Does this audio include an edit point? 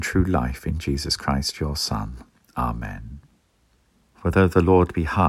yes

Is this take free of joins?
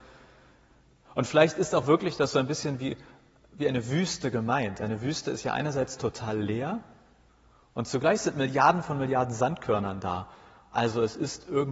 yes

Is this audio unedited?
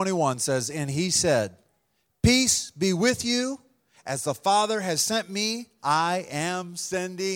yes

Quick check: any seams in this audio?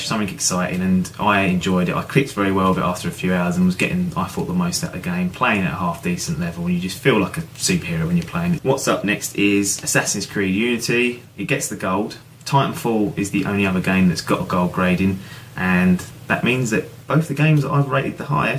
yes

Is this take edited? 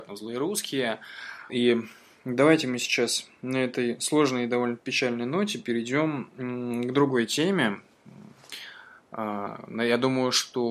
yes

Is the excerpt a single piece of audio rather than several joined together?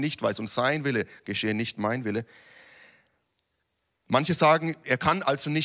yes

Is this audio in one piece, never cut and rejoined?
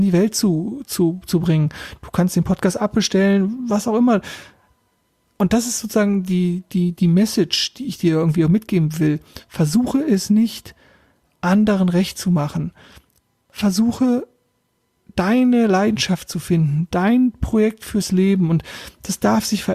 yes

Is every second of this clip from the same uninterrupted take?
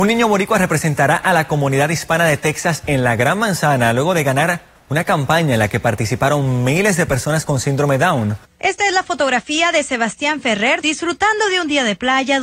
no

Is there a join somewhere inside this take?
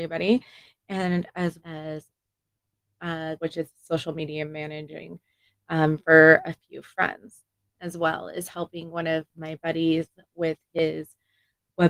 yes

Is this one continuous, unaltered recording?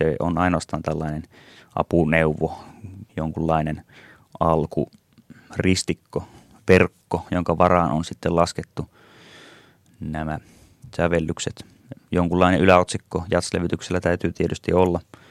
no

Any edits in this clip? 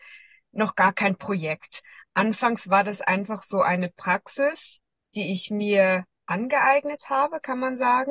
no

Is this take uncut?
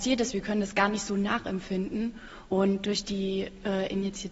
no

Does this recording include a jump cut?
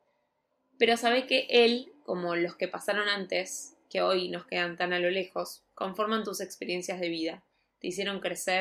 no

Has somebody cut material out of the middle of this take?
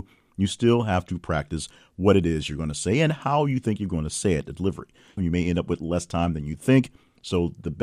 yes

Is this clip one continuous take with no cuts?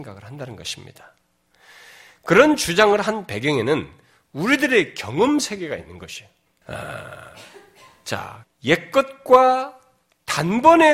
no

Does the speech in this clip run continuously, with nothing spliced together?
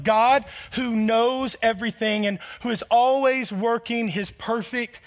yes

